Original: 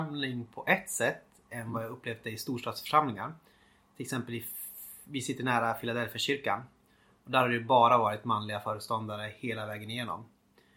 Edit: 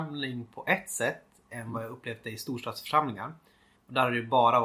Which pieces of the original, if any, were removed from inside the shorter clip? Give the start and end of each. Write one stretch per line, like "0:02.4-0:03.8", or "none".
0:03.8-0:07.1